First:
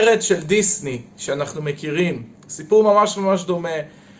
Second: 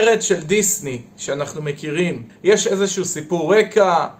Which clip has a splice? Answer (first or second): second